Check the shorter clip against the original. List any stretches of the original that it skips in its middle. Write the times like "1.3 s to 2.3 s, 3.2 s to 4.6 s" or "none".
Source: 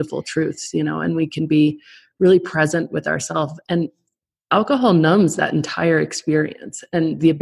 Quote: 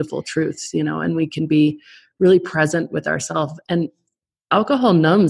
none

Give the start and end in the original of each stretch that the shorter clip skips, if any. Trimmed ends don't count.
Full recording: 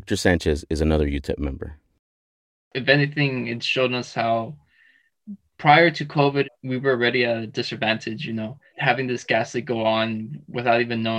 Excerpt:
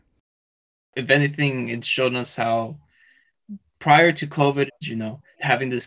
6.6 s to 8.2 s

